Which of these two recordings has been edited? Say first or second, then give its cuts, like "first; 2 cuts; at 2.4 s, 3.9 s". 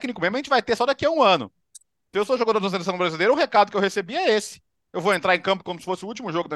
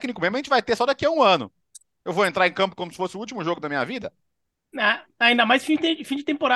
second; 2 cuts; at 2.0 s, 4.7 s